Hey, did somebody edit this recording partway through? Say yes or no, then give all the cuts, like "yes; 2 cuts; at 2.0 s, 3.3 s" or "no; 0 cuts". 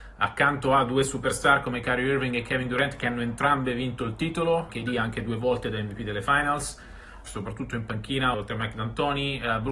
yes; 3 cuts; at 4.7 s, 7.3 s, 8.3 s